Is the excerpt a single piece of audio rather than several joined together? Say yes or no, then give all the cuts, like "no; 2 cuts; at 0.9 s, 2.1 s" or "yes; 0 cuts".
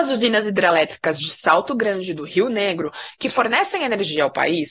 yes; 0 cuts